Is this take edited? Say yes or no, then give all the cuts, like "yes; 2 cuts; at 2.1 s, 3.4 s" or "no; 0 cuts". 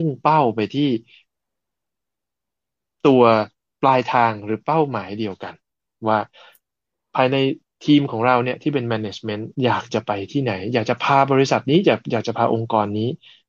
yes; 1 cut; at 9.5 s